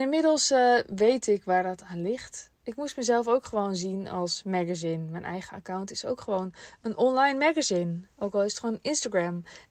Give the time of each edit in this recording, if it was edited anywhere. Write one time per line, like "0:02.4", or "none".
none

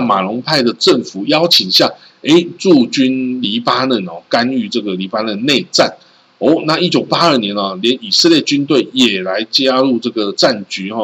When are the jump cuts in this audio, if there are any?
none

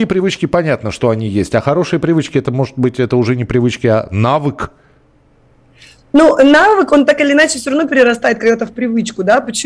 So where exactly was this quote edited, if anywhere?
none

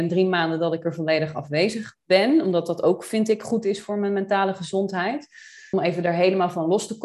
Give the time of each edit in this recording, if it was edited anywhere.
none

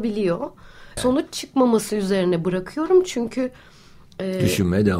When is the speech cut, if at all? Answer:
0:01.0

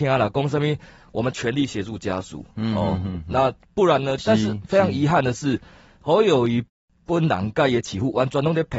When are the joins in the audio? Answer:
0:04.2

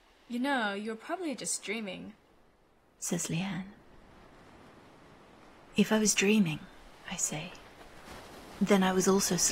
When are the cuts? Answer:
none

